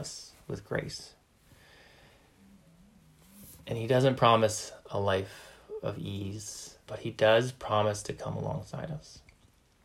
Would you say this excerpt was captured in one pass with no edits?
no; 1 cut; at 6.9 s

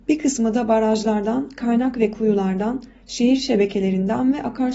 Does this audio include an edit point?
no; 0 cuts

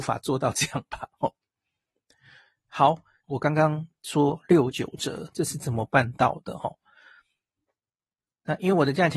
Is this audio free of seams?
no; 1 cut; at 3.2 s

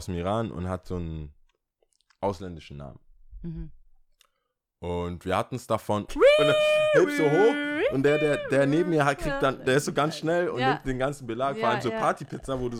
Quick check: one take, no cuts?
no; 1 cut; at 6.1 s

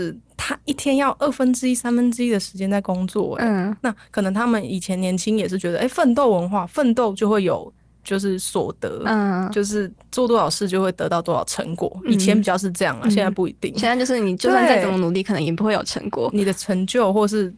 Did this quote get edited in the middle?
no; 0 cuts

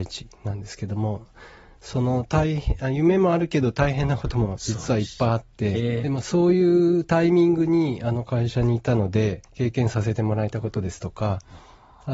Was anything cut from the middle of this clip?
yes; 2 cuts; at 6.0 s, 9.5 s

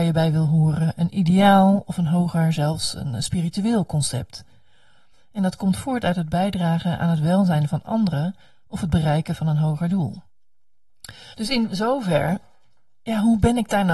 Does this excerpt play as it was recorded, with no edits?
no; 2 cuts; at 5.1 s, 11.3 s

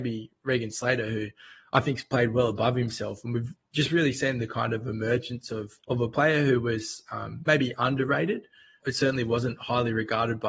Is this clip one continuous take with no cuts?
no; 2 cuts; at 5.8 s, 8.8 s

